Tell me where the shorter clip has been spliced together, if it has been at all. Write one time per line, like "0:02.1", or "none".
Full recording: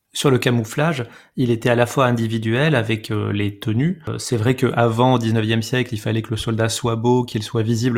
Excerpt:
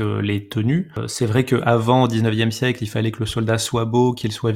none

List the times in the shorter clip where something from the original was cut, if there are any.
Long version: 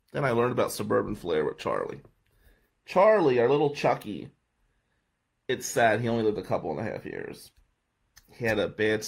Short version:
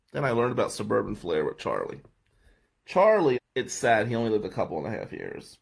0:03.3

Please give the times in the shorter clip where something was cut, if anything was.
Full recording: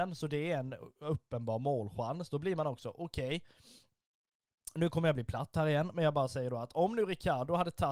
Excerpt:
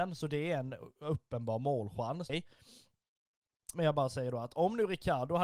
0:02.3
0:03.7

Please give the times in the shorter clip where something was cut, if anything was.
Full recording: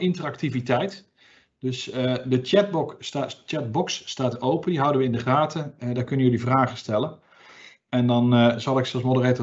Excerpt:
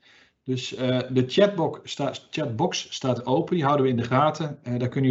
none

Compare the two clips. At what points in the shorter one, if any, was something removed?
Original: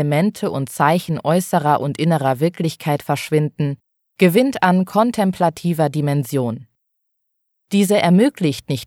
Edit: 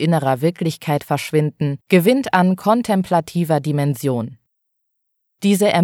0:01.8

